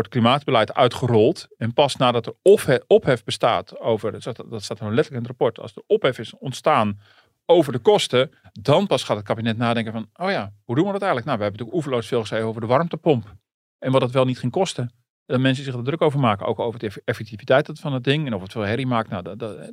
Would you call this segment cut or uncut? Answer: uncut